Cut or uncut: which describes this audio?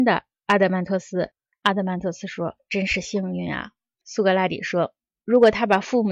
cut